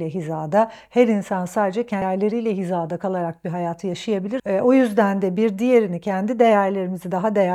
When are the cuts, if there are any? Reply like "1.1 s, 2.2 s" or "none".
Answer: 2.0 s, 4.4 s